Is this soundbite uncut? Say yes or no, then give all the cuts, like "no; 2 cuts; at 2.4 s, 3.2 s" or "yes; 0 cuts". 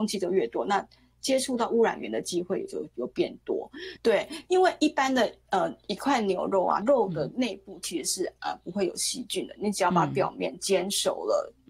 no; 2 cuts; at 4.0 s, 6.8 s